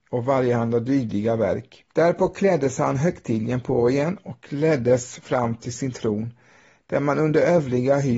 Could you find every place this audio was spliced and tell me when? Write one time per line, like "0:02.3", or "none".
0:01.9